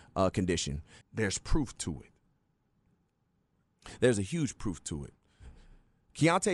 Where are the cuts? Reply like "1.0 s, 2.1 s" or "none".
1.0 s